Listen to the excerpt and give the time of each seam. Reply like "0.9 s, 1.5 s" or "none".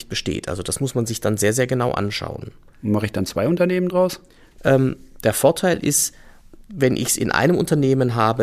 4.6 s